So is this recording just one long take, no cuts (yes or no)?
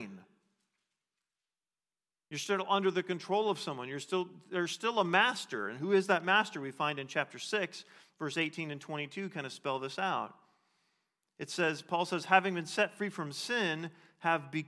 yes